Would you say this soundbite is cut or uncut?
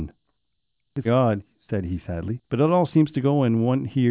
cut